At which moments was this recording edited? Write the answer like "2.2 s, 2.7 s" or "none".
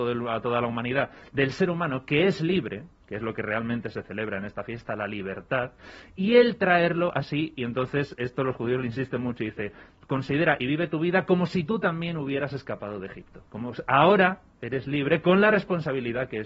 13.5 s